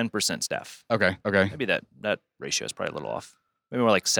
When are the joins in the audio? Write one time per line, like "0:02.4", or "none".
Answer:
0:01.2